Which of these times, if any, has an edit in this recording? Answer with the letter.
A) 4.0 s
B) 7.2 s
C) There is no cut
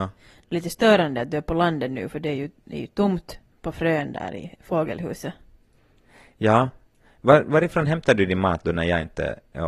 C